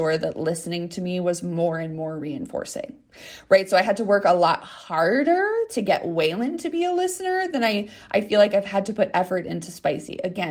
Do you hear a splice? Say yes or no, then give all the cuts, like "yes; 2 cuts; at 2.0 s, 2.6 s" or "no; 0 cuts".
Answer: no; 0 cuts